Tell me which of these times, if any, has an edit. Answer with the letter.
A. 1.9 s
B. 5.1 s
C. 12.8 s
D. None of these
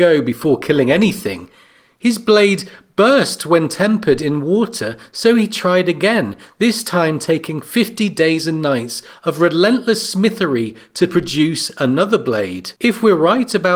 C